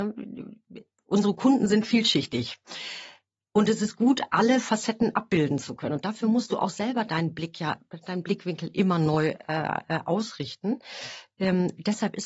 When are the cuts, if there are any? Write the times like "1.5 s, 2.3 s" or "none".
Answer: none

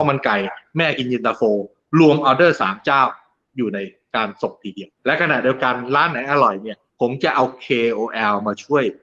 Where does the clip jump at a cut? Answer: 5.0 s, 6.9 s

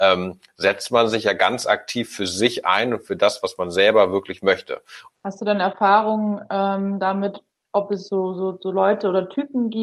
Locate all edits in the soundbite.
5.1 s

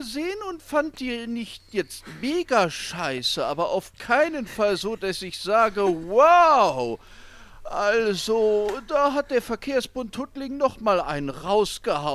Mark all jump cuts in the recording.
none

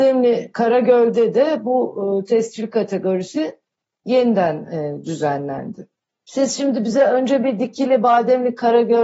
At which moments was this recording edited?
none

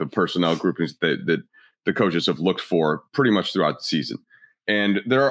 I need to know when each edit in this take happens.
none

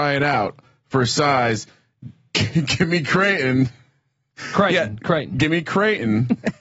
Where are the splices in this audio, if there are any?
none

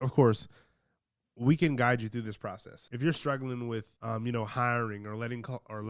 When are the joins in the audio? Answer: 2.9 s, 4.0 s

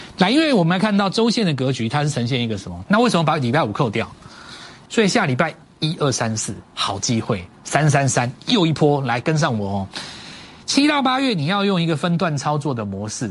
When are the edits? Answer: 2.8 s, 4.9 s

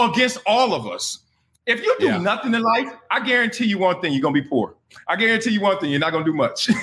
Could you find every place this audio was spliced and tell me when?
none

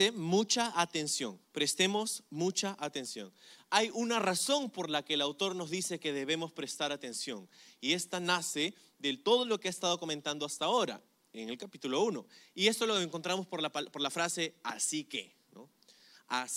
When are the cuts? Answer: 1.4 s, 3.6 s

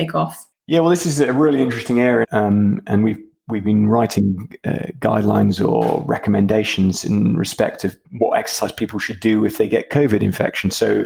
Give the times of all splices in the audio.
2.2 s, 8.0 s

